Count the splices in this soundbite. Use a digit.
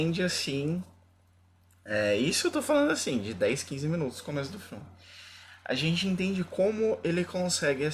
0